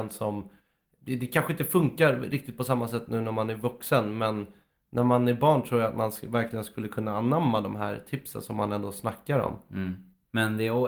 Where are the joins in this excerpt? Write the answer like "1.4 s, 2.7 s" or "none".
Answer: none

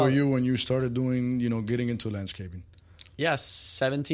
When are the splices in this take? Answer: none

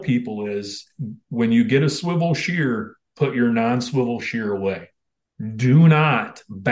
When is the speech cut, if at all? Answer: none

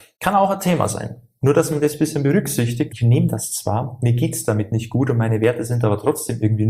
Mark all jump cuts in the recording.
2.9 s

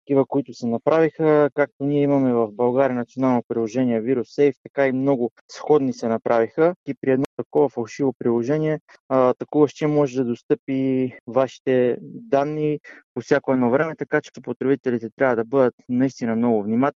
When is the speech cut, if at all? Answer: 6.8 s, 14.3 s

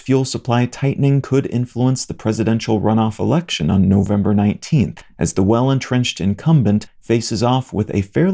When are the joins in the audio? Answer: none

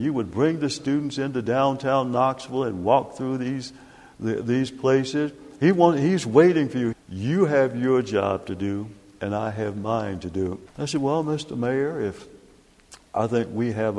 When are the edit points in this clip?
6.9 s, 10.7 s

